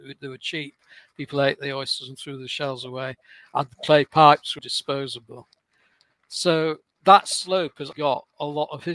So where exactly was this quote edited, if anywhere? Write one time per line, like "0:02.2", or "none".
0:04.6
0:06.9
0:07.9